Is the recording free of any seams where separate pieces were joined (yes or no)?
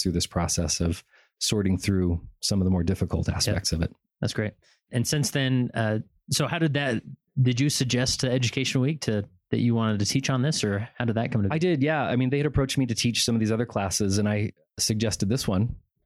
yes